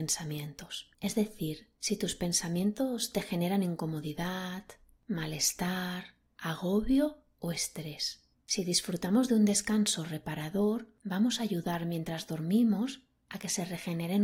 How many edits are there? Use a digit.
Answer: 1